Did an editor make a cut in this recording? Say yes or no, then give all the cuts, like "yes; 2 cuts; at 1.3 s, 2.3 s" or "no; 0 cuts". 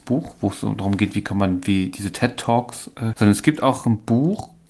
yes; 1 cut; at 3.1 s